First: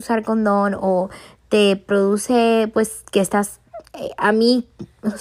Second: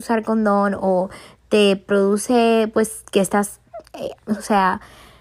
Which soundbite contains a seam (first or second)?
second